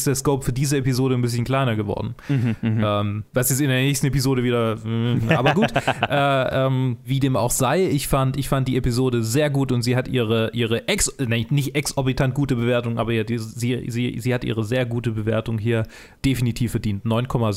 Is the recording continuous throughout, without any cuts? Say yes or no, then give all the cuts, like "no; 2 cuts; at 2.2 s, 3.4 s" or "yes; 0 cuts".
yes; 0 cuts